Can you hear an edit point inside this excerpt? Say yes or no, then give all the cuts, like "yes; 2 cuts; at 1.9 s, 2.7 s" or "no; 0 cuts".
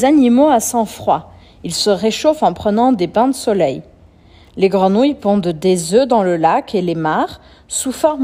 no; 0 cuts